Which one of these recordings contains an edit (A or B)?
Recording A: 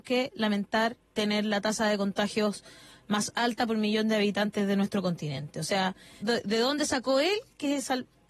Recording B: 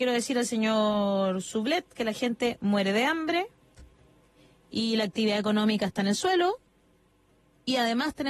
A